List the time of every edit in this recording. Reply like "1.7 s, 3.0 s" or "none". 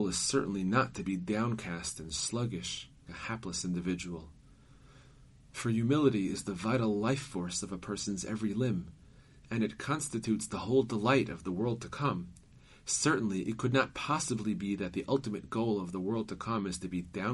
3.1 s